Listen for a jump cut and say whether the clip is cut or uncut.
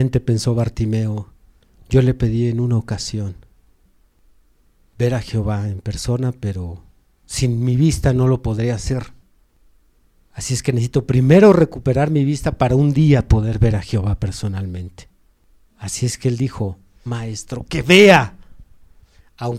cut